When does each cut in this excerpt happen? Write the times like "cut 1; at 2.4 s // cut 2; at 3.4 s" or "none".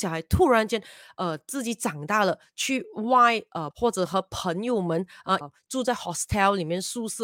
cut 1; at 3.7 s // cut 2; at 5.4 s